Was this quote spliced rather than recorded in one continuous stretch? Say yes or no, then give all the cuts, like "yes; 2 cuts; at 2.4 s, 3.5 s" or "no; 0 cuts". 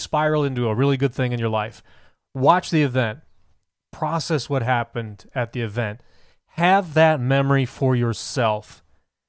no; 0 cuts